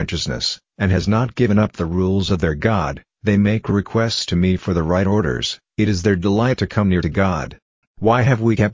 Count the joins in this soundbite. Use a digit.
1